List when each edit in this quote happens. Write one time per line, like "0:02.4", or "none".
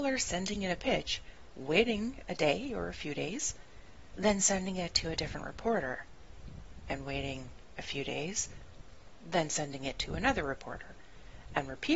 none